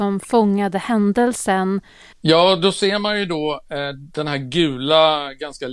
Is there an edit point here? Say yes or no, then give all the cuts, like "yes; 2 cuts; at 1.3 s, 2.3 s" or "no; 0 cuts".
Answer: yes; 1 cut; at 2.1 s